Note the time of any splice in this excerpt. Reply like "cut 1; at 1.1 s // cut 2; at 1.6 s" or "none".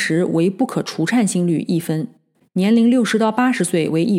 cut 1; at 2.4 s